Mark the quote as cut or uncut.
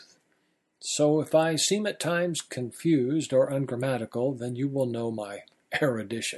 uncut